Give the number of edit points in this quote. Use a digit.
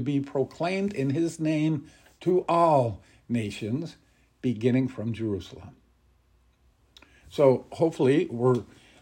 0